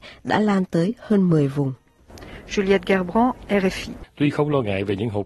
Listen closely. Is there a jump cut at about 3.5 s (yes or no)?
yes